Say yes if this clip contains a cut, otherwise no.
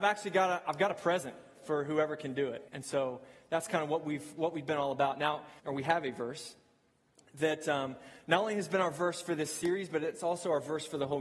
yes